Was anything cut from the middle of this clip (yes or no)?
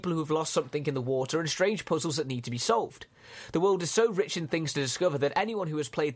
no